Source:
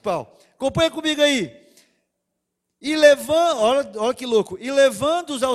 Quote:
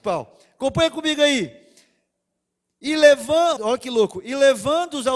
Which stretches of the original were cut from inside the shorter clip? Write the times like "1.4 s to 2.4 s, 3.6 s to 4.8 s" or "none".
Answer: 3.6 s to 3.9 s

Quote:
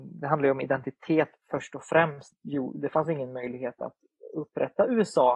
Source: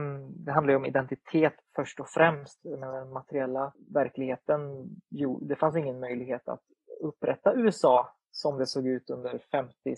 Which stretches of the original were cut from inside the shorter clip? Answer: 2.6 s to 5.0 s

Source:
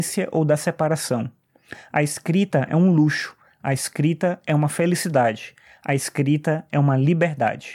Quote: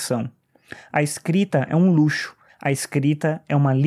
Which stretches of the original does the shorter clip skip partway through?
3.5 s to 5.7 s

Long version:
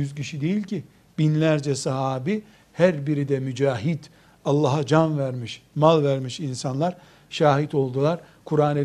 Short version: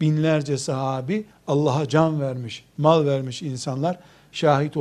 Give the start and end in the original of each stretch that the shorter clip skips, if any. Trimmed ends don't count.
2.5 s to 4.3 s

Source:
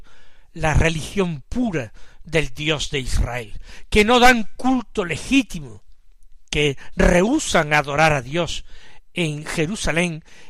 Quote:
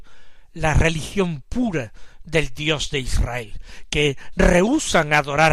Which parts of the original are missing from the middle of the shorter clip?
3.9 s to 6.5 s

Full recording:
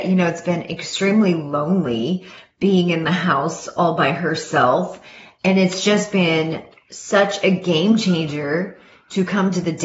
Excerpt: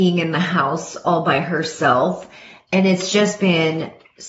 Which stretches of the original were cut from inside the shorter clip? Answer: none

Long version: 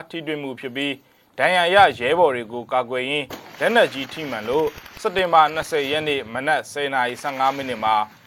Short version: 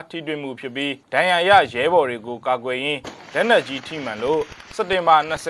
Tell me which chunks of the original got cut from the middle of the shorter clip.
1.0 s to 1.3 s

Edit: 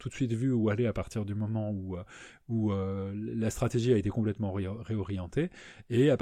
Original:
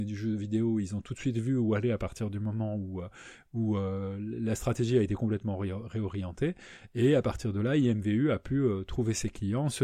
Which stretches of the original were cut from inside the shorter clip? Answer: none

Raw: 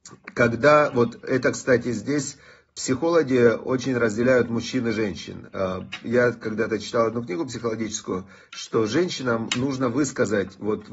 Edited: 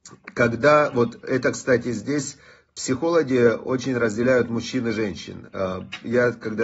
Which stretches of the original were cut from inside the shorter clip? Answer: none

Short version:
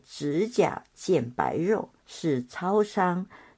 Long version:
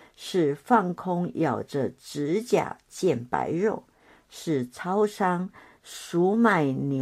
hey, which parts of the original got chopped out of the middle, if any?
3.9 s to 4.2 s

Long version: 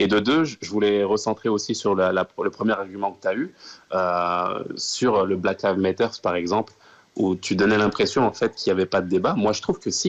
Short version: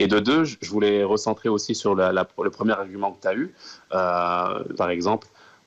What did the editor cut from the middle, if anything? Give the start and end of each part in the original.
4.7 s to 6.2 s

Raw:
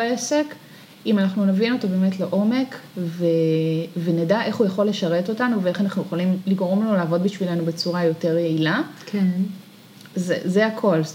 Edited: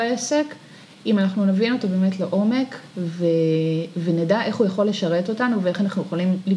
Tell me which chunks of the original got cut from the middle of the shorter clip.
none

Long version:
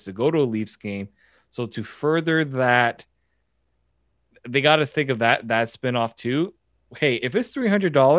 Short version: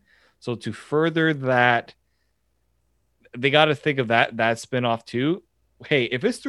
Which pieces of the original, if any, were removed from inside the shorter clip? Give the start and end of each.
none

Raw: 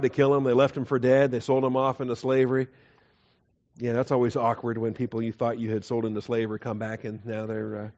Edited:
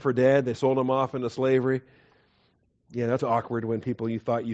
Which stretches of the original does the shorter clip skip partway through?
4.0 s to 4.3 s

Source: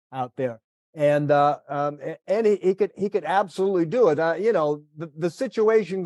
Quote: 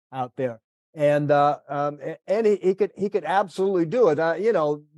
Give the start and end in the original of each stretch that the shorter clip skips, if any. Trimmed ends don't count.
none

